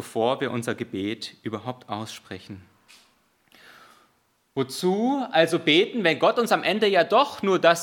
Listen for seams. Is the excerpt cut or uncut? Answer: uncut